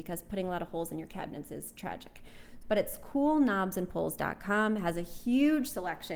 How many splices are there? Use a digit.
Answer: 1